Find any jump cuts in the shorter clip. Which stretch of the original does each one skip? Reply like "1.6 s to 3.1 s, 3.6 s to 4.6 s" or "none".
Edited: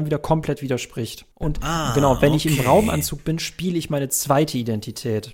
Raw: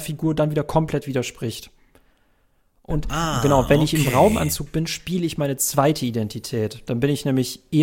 1.8 s to 2.8 s

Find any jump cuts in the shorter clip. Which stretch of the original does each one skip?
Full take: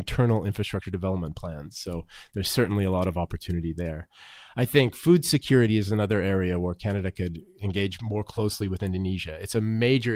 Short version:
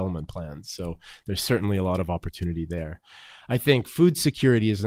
none

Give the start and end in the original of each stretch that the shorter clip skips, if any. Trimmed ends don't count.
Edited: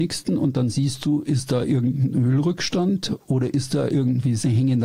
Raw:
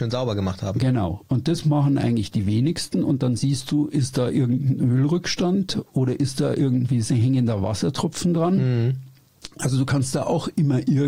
none

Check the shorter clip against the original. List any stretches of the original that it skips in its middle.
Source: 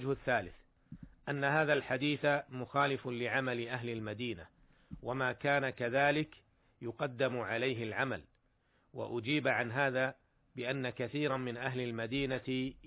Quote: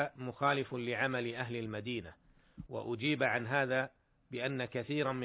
5.0 s to 8.9 s

